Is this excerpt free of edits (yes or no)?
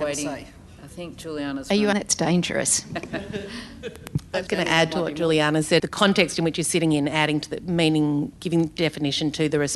no